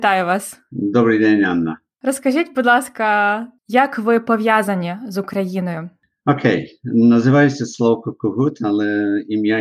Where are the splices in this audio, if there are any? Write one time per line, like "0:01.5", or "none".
0:03.6